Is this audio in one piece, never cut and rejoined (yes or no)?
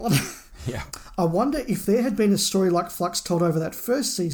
yes